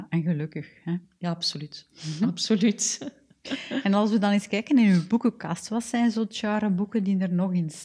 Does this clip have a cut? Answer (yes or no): no